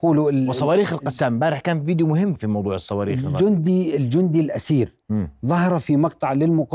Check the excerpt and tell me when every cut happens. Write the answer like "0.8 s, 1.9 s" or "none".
2.3 s